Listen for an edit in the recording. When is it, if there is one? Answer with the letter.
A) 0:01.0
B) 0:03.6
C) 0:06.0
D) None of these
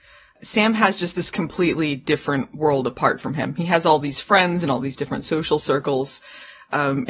D